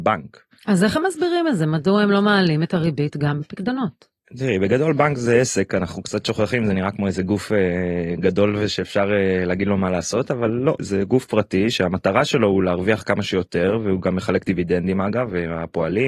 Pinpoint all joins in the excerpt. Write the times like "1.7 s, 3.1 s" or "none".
10.8 s